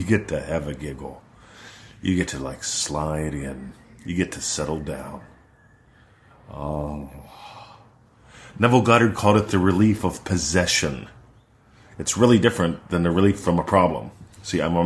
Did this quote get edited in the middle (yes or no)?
no